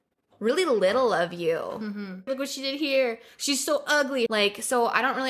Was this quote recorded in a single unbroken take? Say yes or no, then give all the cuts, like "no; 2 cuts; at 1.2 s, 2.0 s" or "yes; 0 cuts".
no; 2 cuts; at 2.3 s, 4.3 s